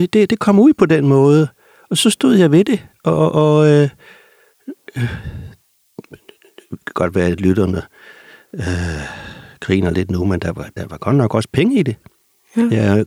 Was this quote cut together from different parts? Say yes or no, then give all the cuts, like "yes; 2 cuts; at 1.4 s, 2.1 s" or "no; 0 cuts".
no; 0 cuts